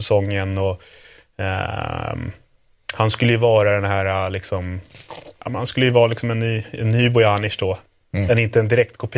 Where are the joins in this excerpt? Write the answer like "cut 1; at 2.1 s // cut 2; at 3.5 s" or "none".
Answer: none